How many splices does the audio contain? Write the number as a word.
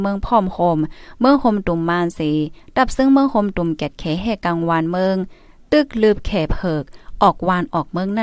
zero